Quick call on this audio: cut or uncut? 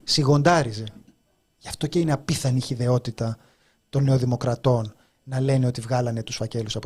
uncut